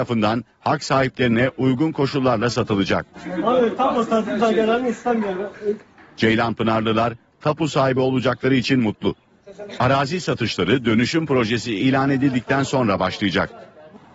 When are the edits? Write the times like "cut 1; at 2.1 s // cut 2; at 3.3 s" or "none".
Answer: cut 1; at 9.7 s